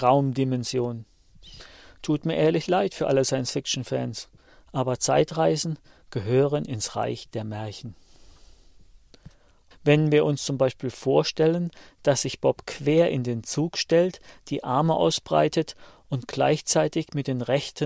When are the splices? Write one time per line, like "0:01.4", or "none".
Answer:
0:09.7